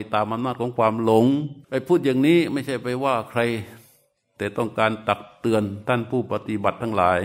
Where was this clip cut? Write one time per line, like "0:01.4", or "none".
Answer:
0:01.6